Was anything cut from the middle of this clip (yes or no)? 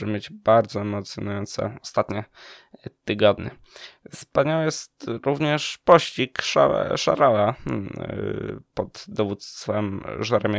no